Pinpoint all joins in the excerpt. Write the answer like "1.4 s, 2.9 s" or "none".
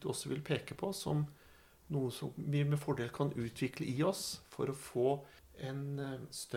none